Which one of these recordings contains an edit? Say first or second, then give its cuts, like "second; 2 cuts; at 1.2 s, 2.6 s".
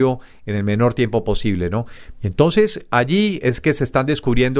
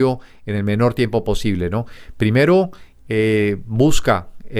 first; 1 cut; at 2.1 s